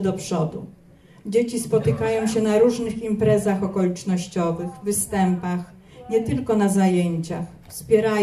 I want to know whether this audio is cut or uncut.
uncut